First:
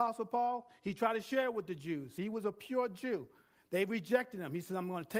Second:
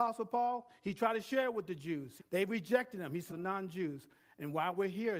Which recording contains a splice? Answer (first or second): second